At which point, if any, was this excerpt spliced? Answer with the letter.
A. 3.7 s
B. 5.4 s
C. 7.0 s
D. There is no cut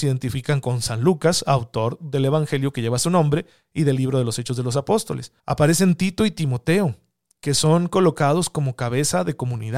B